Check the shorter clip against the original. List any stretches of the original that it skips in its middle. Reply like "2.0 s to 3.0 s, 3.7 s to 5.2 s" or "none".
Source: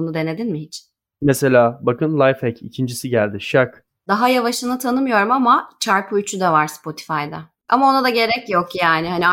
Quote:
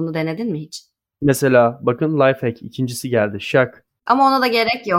4.0 s to 7.6 s